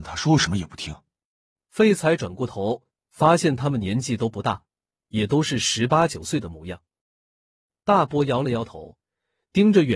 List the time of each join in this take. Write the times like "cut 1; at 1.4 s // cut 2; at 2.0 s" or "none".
cut 1; at 2.9 s // cut 2; at 7.0 s